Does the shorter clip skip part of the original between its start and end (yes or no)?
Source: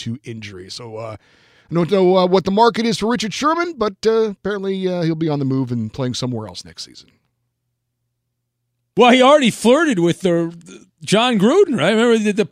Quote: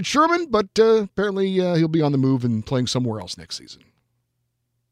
no